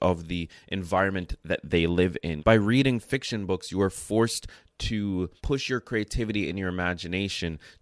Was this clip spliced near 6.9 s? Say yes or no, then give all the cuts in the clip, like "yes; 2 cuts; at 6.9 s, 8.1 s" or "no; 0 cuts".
no; 2 cuts; at 2.4 s, 5.4 s